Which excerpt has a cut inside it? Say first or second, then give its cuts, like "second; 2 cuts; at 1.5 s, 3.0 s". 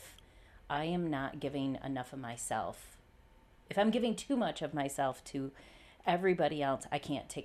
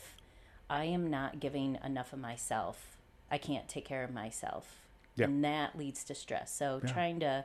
second; 1 cut; at 3.3 s